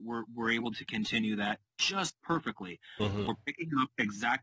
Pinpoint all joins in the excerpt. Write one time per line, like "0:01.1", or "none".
none